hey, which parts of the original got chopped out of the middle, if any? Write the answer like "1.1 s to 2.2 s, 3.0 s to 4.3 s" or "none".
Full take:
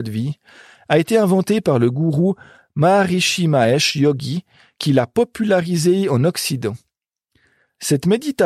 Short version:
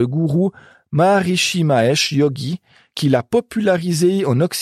none